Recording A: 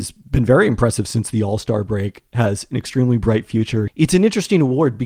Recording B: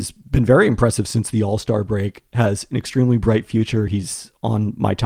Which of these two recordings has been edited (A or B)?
A